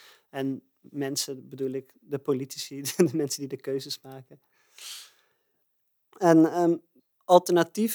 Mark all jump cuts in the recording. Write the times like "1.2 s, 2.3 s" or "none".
none